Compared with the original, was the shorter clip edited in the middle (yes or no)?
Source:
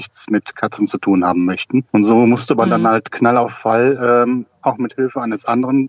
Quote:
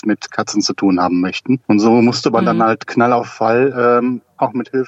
no